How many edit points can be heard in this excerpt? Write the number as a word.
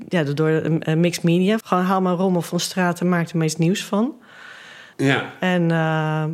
two